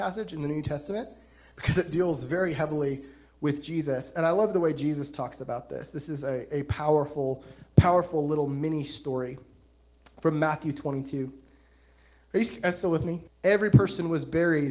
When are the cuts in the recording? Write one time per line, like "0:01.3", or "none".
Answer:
0:13.3